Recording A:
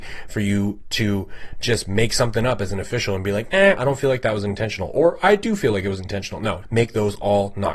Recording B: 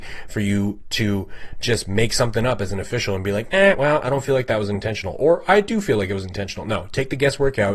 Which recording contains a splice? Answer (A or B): A